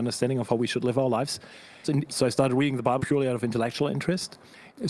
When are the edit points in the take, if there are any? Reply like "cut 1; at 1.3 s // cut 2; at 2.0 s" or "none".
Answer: cut 1; at 1.8 s // cut 2; at 3.0 s